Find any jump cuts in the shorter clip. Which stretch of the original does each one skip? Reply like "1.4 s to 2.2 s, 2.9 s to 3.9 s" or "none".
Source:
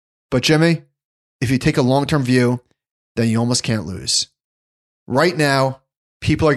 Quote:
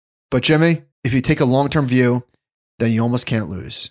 0.9 s to 1.3 s